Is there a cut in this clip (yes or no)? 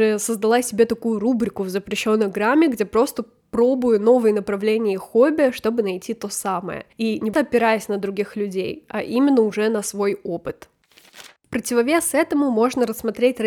yes